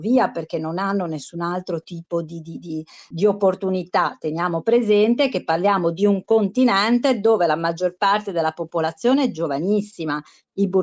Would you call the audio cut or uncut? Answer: uncut